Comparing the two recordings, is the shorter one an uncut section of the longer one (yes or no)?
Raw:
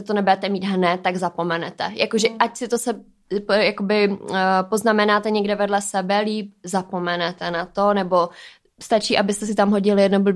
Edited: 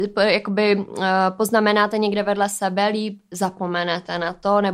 yes